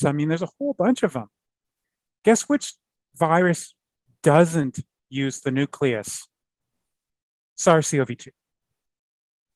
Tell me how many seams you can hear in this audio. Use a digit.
0